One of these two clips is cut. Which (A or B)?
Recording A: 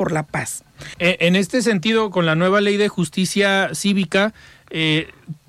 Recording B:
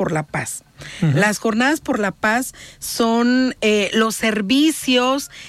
A